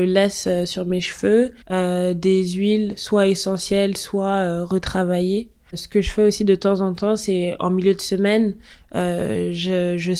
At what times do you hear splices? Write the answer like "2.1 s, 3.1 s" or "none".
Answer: 1.6 s, 5.7 s